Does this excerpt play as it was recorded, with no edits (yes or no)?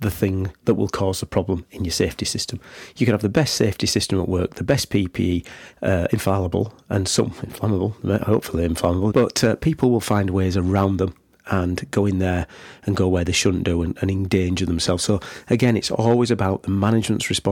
no